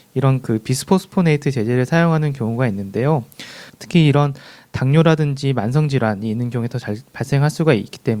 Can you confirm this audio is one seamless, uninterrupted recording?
no; 1 cut; at 3.7 s

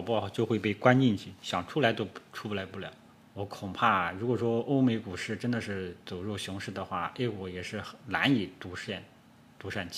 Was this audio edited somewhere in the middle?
yes; 1 cut; at 3.2 s

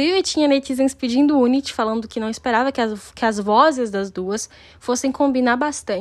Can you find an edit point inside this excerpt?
no; 0 cuts

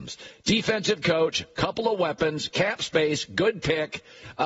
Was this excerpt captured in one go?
yes; 0 cuts

